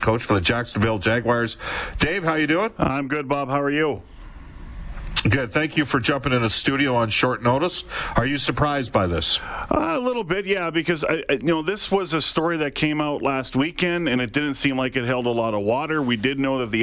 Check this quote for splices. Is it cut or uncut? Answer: uncut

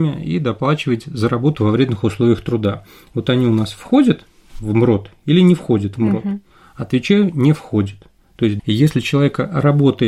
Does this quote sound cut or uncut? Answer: cut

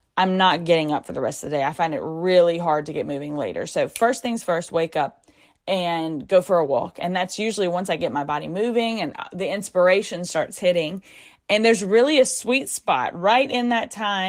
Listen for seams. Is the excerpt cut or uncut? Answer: uncut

